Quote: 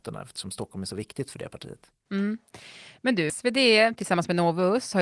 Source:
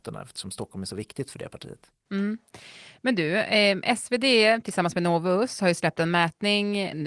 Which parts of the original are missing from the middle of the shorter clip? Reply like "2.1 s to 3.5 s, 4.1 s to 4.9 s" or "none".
3.3 s to 4.0 s